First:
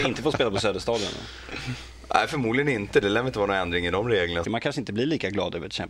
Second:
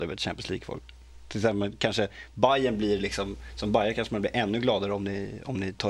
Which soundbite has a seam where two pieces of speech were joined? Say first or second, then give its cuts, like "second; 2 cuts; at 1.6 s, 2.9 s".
first; 1 cut; at 4.4 s